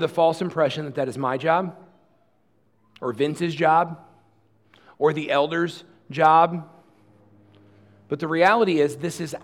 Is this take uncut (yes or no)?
yes